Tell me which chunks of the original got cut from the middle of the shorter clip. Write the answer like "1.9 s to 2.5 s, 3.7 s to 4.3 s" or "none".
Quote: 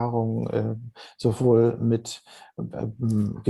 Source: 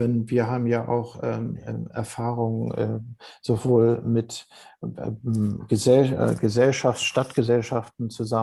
none